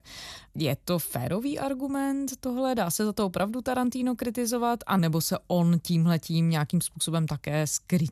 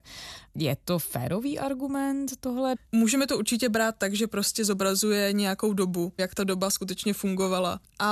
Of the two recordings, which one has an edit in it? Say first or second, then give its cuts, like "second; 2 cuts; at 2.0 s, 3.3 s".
second; 2 cuts; at 2.7 s, 6.2 s